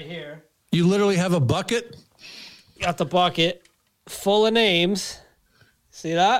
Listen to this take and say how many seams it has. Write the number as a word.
zero